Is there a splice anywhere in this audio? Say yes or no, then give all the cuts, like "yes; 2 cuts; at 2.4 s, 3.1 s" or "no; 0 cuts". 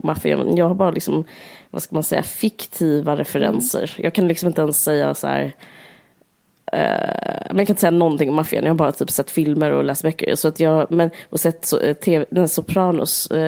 no; 0 cuts